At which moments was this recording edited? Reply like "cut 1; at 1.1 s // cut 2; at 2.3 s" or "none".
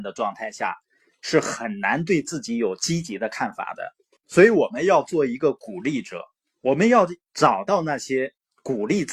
none

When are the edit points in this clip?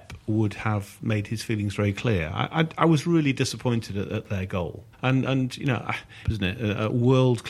cut 1; at 4.9 s // cut 2; at 6.2 s

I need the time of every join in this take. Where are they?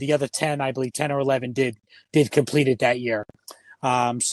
none

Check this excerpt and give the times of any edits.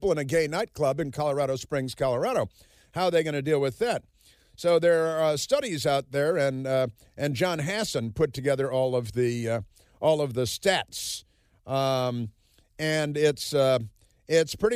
none

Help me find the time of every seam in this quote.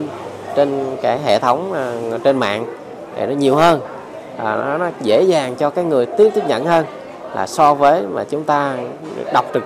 none

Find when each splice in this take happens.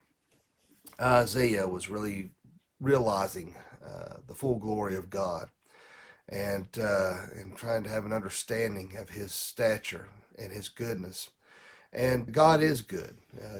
cut 1; at 12.3 s

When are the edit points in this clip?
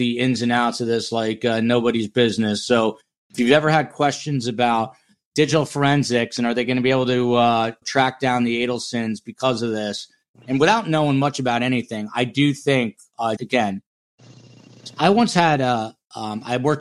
cut 1; at 7.8 s // cut 2; at 13.4 s

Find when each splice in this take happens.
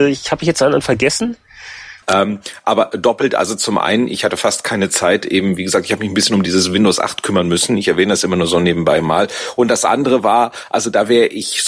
cut 1; at 2.0 s

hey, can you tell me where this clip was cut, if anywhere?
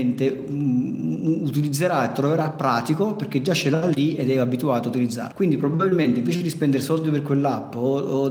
cut 1; at 5.3 s

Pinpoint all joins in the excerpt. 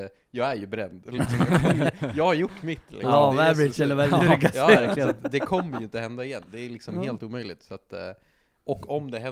none

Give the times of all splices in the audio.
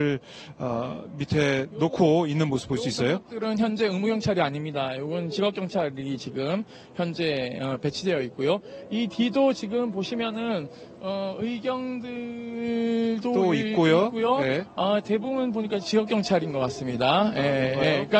none

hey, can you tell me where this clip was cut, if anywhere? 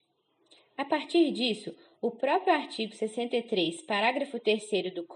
none

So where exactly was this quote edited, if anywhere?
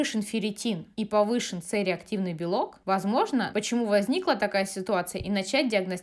cut 1; at 0.9 s // cut 2; at 3.5 s

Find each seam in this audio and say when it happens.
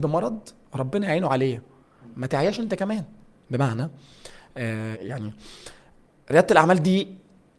cut 1; at 4.9 s

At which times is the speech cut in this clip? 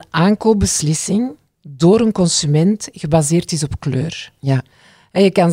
none

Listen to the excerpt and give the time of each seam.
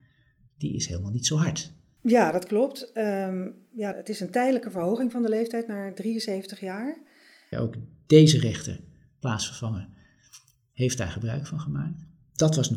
cut 1; at 2.0 s // cut 2; at 3.9 s // cut 3; at 7.5 s

